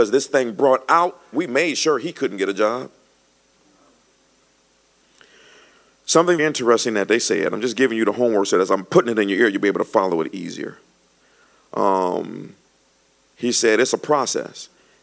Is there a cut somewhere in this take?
yes; 2 cuts; at 1.3 s, 6.4 s

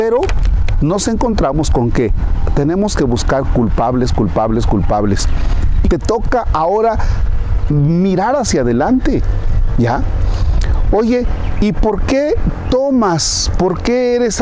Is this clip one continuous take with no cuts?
no; 2 cuts; at 5.8 s, 7.7 s

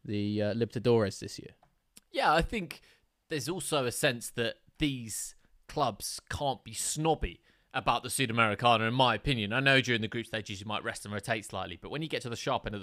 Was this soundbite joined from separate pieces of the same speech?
no; 0 cuts

